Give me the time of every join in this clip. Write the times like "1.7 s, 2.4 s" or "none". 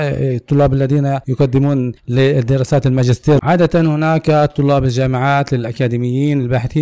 3.4 s